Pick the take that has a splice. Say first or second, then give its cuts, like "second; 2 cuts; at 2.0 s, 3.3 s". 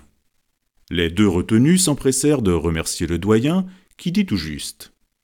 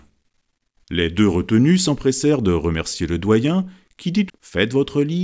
second; 1 cut; at 4.3 s